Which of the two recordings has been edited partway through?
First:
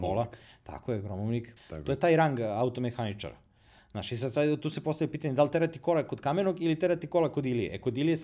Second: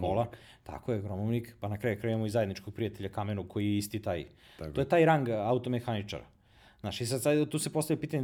first; 1 cut; at 1.6 s

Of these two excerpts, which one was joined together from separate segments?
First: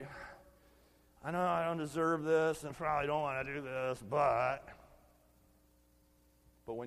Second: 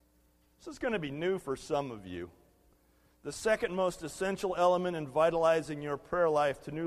first; 1 cut; at 2.7 s

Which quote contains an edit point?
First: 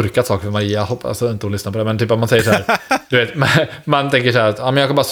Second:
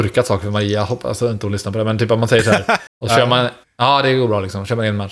second; 1 cut; at 2.9 s

